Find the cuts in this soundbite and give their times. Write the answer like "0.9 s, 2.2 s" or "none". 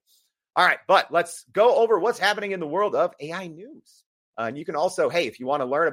4.3 s